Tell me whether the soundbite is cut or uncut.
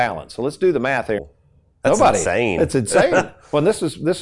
cut